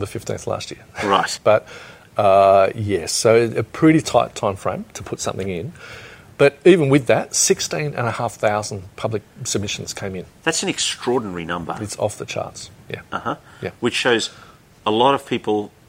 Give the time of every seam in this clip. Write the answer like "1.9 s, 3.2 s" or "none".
1.4 s